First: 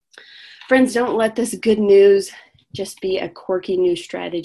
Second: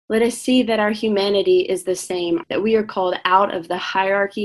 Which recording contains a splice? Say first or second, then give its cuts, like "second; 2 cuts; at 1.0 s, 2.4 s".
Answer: second; 1 cut; at 2.4 s